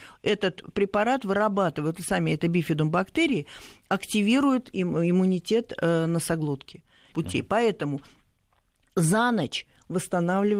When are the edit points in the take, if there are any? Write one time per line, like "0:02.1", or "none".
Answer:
0:07.1